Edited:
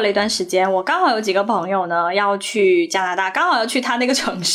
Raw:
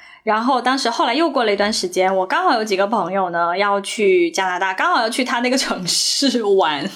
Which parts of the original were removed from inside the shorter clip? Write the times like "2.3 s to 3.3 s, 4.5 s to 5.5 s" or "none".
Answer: none